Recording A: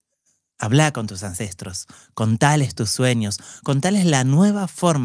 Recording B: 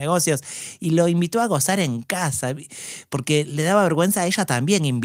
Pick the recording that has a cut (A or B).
A